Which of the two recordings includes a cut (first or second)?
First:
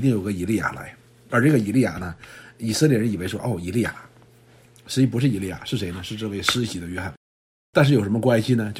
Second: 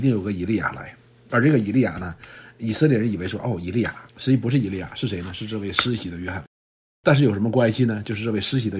second